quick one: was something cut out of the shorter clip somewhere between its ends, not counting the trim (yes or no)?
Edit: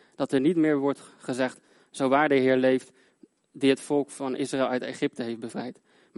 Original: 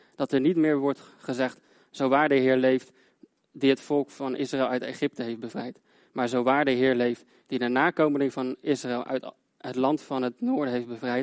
no